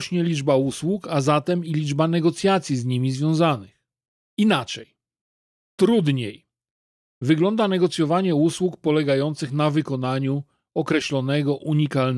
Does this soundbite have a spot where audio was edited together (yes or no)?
yes